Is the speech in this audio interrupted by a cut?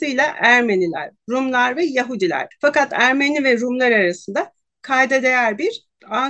yes; 1 cut; at 2.5 s

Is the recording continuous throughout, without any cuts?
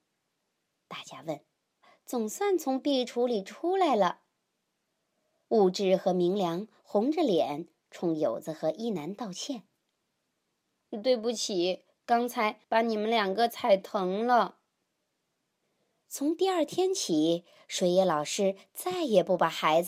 no; 1 cut; at 1.8 s

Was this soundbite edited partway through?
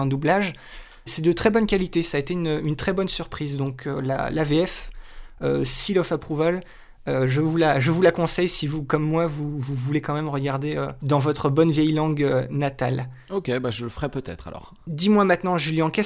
yes; 1 cut; at 1.1 s

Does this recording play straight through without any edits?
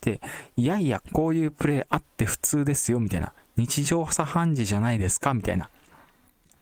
no; 1 cut; at 1.0 s

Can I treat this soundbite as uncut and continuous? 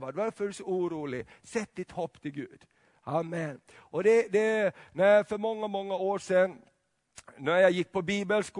yes; 0 cuts

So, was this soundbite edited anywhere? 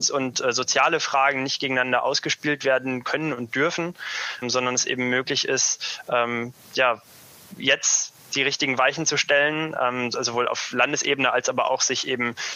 yes; 1 cut; at 4.4 s

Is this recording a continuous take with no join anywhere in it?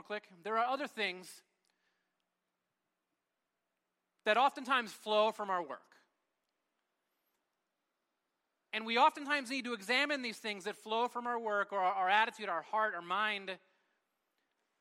yes; 0 cuts

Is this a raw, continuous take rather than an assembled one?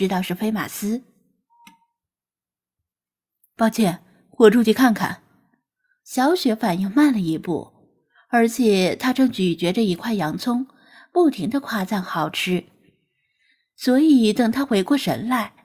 no; 1 cut; at 6.0 s

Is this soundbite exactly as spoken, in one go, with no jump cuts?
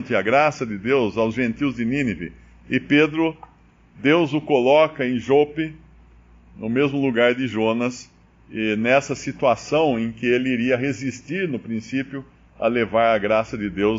yes; 0 cuts

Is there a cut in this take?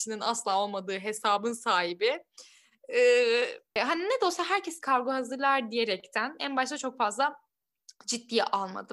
yes; 1 cut; at 3.8 s

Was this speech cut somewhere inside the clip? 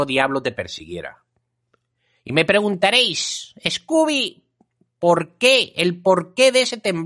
no; 0 cuts

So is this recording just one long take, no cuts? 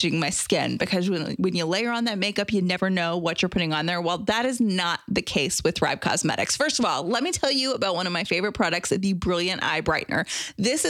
yes; 0 cuts

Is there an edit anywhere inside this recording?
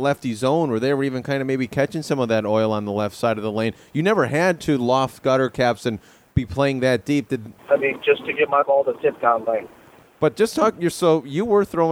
yes; 2 cuts; at 7.6 s, 10.0 s

